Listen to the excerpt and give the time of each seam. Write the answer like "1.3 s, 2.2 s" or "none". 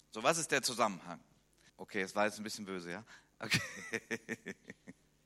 1.7 s